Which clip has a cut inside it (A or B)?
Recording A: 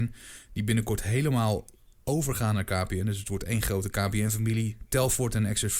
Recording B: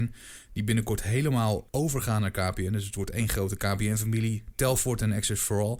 B